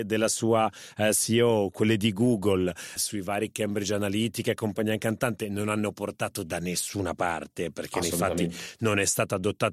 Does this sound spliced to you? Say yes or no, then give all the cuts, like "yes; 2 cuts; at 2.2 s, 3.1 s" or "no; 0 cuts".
yes; 1 cut; at 3.0 s